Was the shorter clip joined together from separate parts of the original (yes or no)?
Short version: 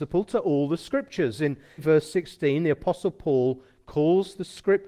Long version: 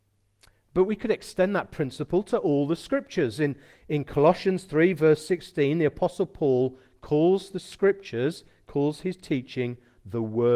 yes